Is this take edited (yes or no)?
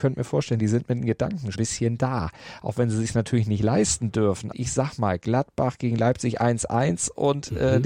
yes